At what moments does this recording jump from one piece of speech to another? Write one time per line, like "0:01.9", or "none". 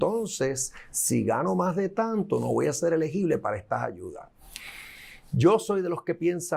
none